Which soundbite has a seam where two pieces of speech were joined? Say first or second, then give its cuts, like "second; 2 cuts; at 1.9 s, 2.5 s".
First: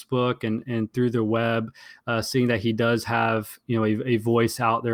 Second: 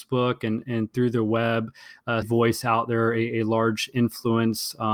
second; 1 cut; at 2.2 s